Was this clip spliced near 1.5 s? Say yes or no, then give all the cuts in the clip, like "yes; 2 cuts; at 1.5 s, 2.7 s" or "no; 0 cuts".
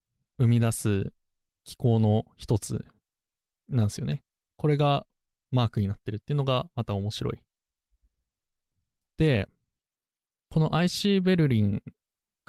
yes; 1 cut; at 1.5 s